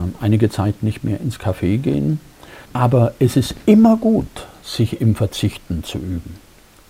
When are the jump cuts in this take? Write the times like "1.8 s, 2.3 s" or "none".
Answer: 2.6 s

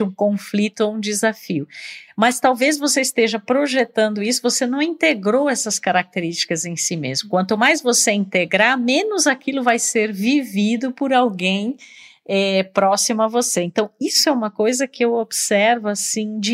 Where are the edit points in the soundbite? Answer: none

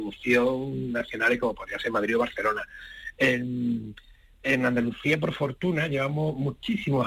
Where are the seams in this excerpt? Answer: none

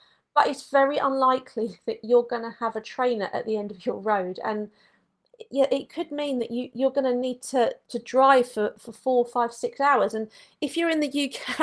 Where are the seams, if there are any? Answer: 7.8 s

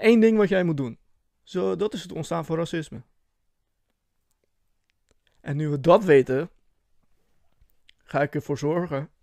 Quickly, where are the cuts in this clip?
1.3 s

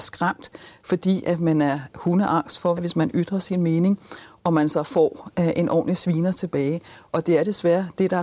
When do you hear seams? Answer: 2.8 s

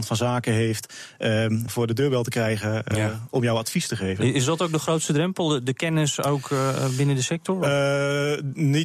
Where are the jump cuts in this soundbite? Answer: 1.7 s

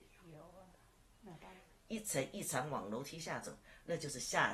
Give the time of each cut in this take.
none

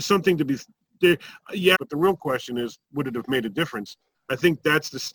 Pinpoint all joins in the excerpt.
1.7 s, 4.1 s

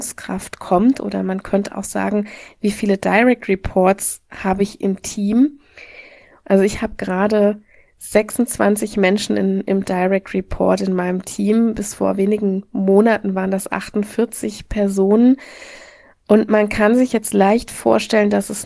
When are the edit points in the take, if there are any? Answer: 6.4 s

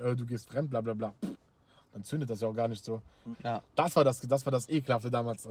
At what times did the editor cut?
3.3 s

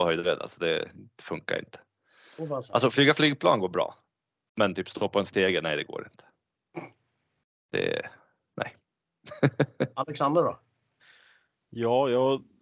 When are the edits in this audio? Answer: none

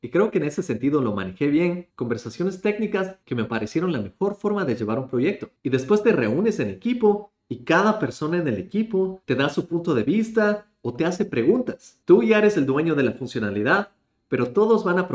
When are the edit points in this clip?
1.9 s, 5.6 s, 12.0 s

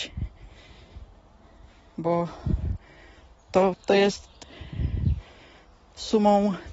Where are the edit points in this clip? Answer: 3.7 s

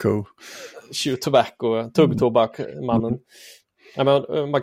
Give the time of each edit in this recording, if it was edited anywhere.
none

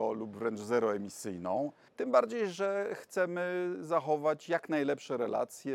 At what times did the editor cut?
1.9 s

